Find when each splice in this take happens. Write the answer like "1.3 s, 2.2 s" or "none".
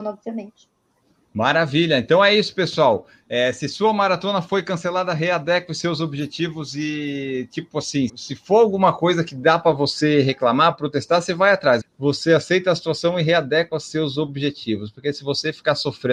8.1 s, 11.8 s